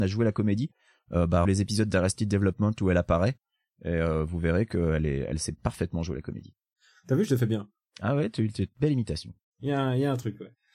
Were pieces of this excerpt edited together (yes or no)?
yes